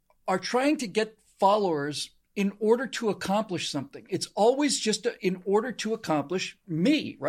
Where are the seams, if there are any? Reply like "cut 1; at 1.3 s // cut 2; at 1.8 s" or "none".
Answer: none